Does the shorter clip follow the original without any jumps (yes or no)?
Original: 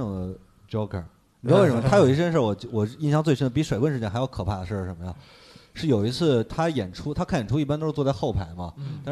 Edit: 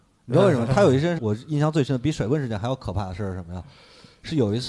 no